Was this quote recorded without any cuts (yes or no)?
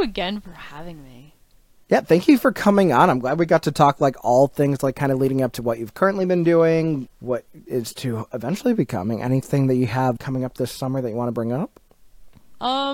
no